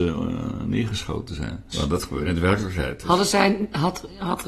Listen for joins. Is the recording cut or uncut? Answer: cut